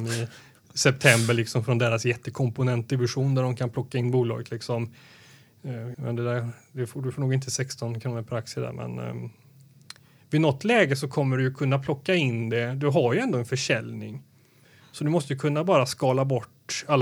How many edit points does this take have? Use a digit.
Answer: 1